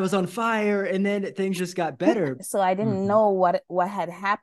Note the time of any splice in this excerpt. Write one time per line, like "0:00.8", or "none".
0:02.3